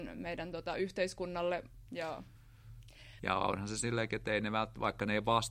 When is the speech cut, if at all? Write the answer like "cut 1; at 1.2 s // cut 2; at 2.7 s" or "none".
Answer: cut 1; at 1.9 s // cut 2; at 3.2 s